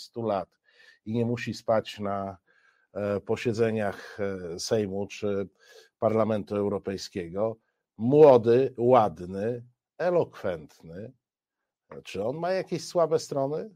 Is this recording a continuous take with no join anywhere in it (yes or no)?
yes